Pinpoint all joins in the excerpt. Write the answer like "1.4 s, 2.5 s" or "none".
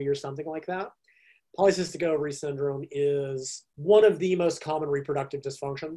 1.5 s, 3.7 s